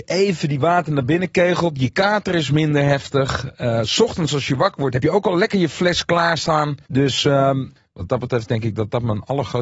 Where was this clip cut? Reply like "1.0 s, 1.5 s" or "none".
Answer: none